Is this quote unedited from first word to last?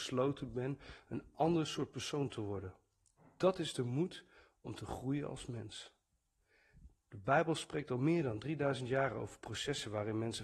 yes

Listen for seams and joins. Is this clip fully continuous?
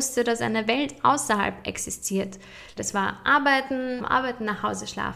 no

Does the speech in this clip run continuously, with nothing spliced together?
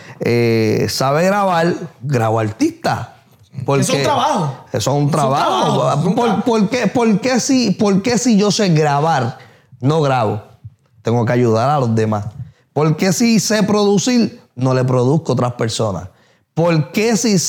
yes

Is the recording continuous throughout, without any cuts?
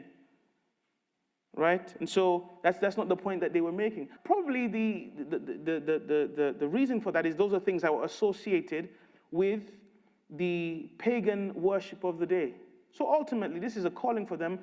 no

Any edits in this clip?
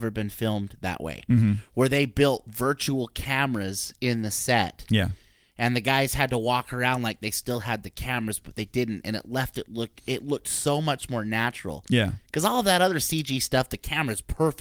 no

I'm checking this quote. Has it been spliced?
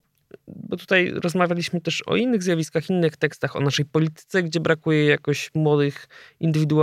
no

